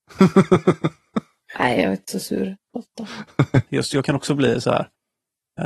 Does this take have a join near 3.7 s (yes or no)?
yes